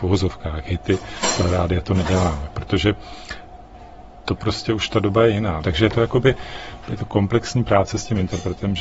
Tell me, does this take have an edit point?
yes; 2 cuts; at 5.6 s, 6.8 s

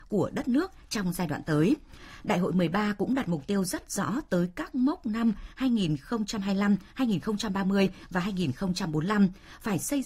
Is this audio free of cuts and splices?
yes; 0 cuts

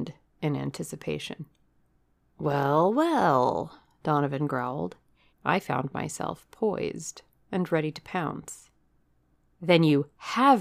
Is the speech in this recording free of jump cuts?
no; 2 cuts; at 2.3 s, 5.3 s

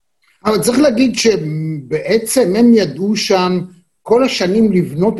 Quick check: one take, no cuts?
yes; 0 cuts

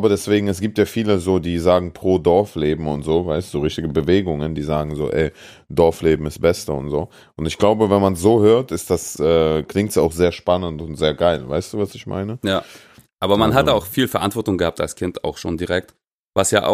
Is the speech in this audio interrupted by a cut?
yes; 1 cut; at 9.2 s

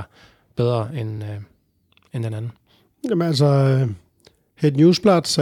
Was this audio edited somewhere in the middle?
no; 0 cuts

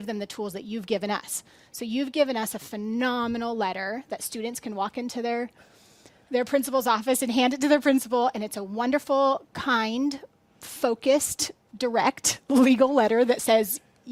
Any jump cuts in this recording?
no; 0 cuts

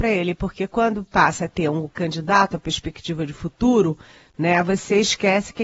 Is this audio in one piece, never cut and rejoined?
yes; 0 cuts

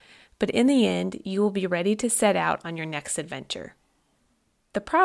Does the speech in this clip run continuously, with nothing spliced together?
yes; 0 cuts

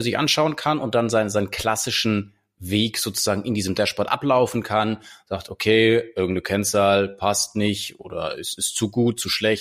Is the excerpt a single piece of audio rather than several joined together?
yes; 0 cuts

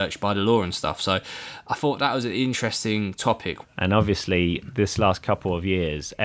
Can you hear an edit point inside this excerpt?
yes; 1 cut; at 3.6 s

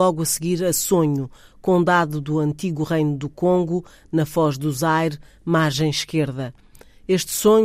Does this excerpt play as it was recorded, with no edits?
yes; 0 cuts

